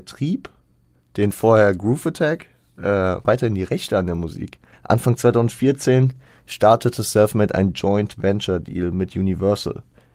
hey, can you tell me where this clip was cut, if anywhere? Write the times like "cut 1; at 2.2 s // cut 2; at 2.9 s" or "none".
cut 1; at 3.2 s // cut 2; at 4.7 s

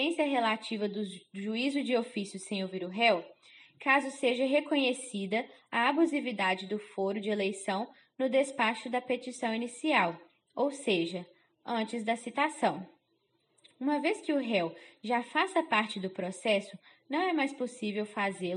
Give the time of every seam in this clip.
none

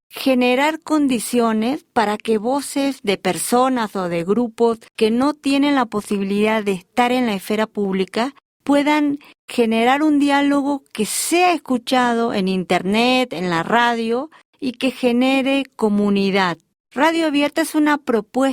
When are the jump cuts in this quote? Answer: cut 1; at 16.8 s

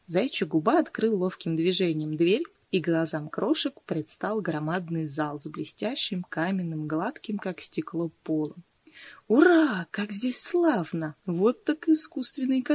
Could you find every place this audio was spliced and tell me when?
none

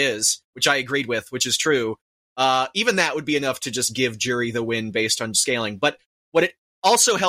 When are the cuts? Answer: none

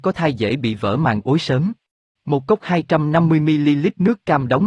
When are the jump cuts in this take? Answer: cut 1; at 2.2 s

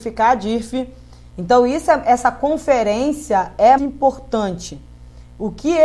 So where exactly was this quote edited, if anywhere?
cut 1; at 1.3 s // cut 2; at 3.8 s

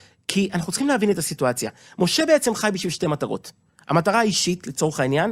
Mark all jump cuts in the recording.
none

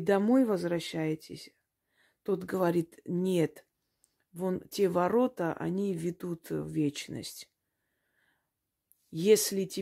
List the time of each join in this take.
none

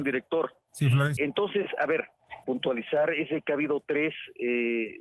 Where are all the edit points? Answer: cut 1; at 1.2 s // cut 2; at 2.4 s

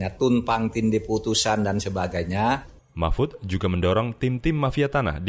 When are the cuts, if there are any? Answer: cut 1; at 2.8 s

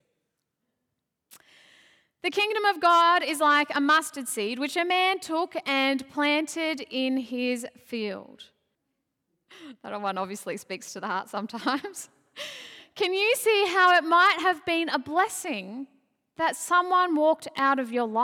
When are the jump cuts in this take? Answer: cut 1; at 8.7 s

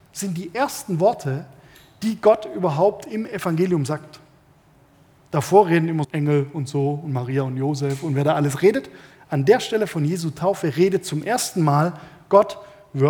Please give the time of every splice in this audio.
cut 1; at 6.0 s

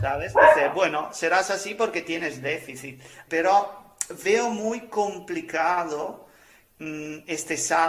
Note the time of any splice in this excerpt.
cut 1; at 3.3 s

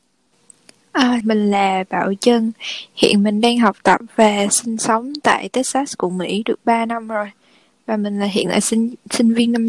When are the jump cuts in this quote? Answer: cut 1; at 1.2 s

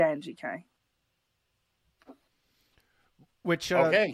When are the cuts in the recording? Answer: none

